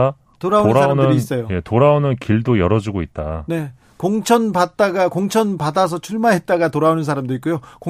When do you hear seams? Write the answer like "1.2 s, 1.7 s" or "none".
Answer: none